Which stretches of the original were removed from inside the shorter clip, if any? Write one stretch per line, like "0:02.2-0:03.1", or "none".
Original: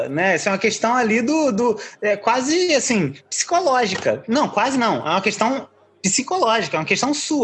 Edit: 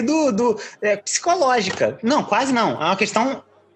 0:02.2-0:03.2